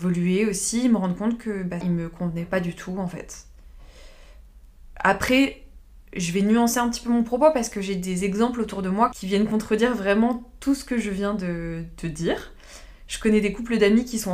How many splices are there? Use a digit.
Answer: 1